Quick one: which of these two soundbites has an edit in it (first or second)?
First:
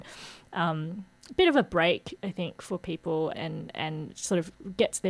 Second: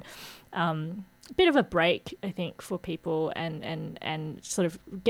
first